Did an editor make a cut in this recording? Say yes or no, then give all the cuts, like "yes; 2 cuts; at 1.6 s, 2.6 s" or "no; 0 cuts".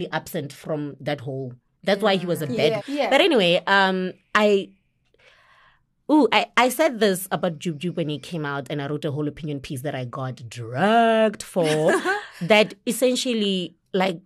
yes; 1 cut; at 2.8 s